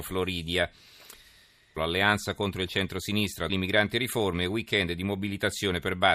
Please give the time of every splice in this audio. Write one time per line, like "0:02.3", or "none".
0:01.8
0:03.5